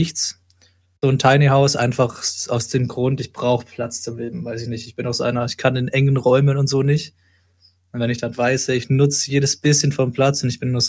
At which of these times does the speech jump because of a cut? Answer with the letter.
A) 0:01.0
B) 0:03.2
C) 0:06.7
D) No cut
A